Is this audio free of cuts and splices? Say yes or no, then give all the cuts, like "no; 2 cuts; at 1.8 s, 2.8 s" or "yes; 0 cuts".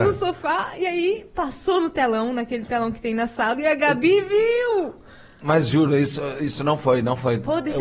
yes; 0 cuts